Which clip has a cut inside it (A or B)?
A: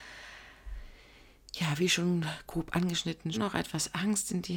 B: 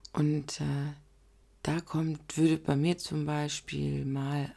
A